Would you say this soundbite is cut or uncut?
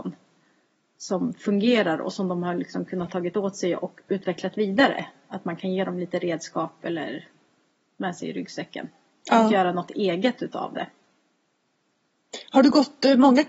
uncut